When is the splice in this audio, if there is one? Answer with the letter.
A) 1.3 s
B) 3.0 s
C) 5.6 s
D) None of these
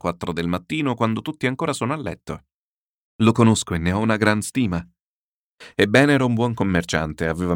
B